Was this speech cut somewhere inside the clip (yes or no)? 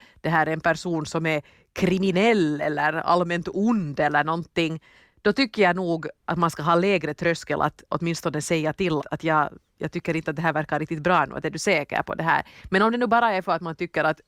yes